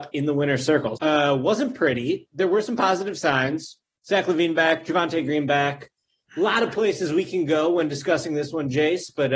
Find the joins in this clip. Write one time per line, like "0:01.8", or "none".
0:01.0